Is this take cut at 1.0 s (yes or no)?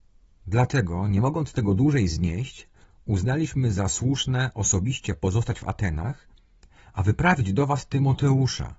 no